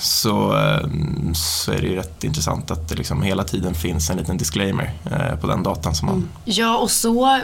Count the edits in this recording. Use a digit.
1